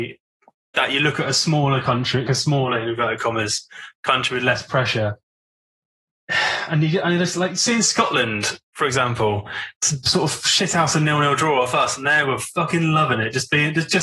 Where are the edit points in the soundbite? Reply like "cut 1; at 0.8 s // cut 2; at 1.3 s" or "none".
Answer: cut 1; at 2.3 s